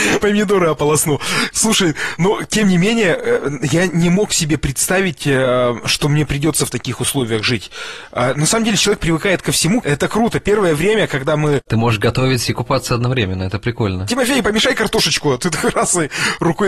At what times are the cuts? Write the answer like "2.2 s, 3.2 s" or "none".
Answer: 9.8 s